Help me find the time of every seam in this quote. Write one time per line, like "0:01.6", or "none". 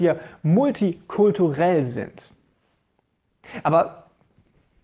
none